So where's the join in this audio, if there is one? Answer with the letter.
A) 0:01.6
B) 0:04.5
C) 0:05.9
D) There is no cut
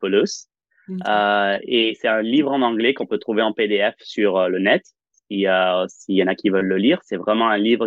D